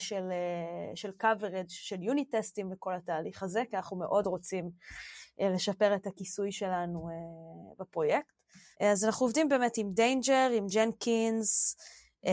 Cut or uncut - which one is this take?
cut